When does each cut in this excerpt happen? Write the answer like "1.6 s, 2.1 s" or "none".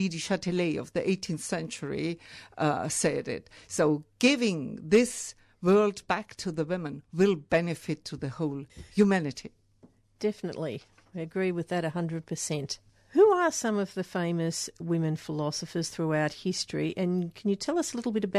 none